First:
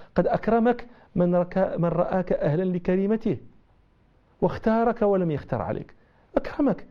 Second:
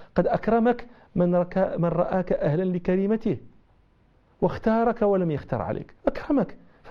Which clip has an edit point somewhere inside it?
second; 1 cut; at 6.0 s

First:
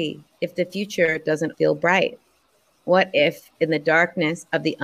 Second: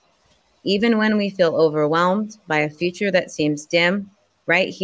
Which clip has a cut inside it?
first; 1 cut; at 1.5 s

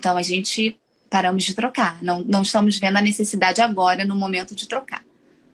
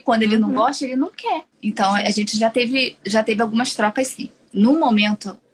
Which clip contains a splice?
second; 1 cut; at 1.5 s

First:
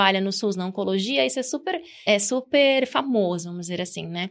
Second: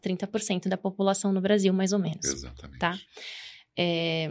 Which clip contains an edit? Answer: first; 1 cut; at 2.1 s

